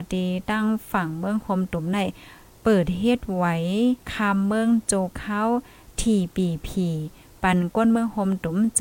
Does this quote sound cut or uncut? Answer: cut